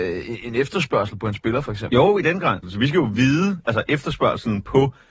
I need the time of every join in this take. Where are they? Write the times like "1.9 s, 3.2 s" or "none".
2.6 s